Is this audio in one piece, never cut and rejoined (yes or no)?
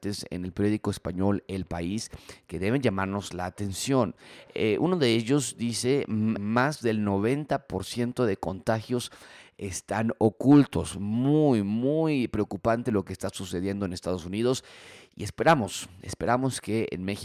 no